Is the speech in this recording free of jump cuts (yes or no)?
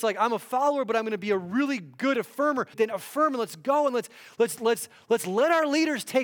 no